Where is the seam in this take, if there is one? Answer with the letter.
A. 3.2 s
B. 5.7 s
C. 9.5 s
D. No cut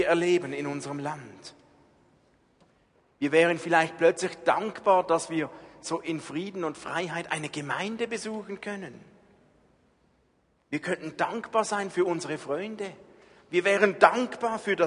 D